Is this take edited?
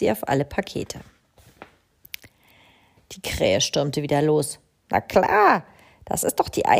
yes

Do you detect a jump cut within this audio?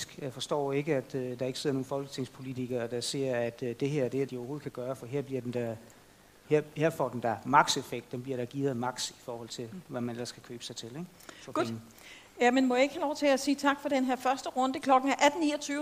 yes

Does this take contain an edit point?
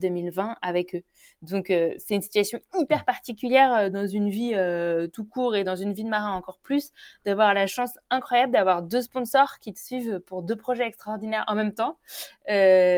no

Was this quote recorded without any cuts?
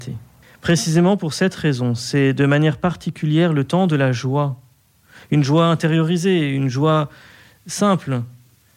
yes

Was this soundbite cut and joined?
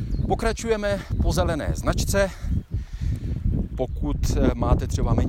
yes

